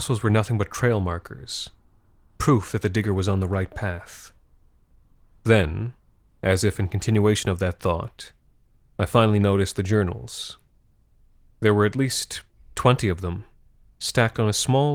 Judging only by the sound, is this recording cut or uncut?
uncut